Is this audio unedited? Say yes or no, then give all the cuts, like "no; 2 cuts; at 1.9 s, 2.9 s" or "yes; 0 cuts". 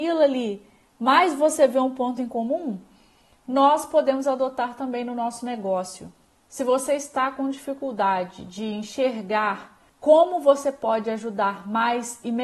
no; 2 cuts; at 6.5 s, 9.9 s